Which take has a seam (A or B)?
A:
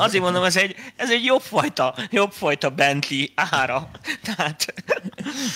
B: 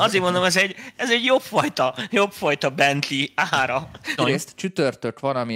B